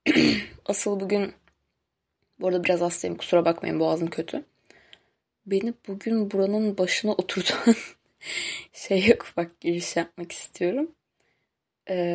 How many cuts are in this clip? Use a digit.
1